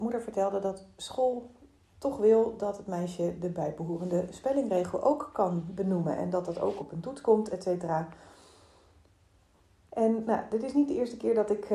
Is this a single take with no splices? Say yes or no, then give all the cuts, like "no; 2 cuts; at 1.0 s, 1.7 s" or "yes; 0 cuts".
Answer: yes; 0 cuts